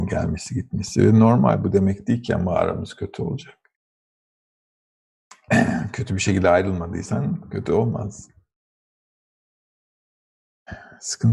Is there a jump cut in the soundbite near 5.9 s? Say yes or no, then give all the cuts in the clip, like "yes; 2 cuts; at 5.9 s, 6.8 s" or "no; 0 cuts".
no; 0 cuts